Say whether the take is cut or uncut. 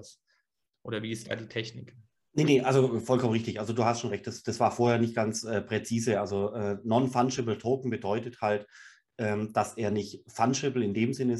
uncut